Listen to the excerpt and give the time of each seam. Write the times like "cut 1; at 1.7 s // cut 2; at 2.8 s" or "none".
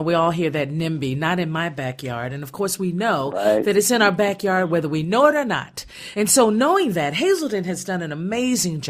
none